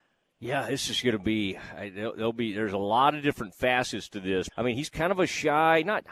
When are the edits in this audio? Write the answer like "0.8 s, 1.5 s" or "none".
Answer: 4.5 s

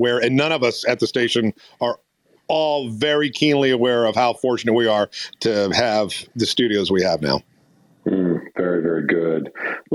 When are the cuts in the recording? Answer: none

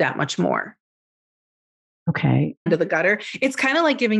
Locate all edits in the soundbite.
2.7 s

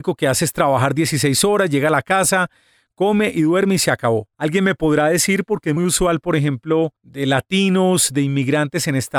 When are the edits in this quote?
4.3 s, 5.8 s, 7.0 s

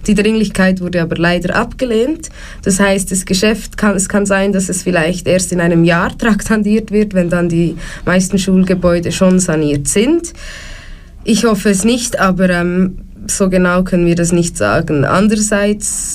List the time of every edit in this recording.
none

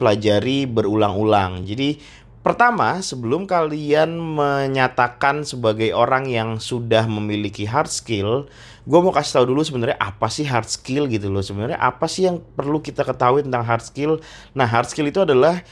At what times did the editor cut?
1.6 s

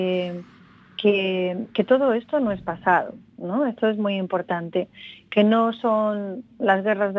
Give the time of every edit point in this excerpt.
none

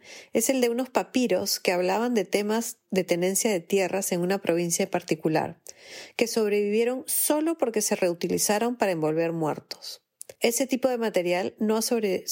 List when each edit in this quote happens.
10.3 s

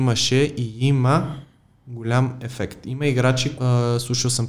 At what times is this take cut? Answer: 3.6 s

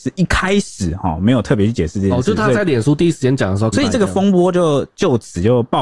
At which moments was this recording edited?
3.7 s

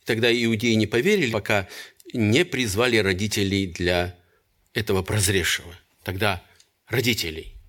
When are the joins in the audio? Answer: 1.3 s

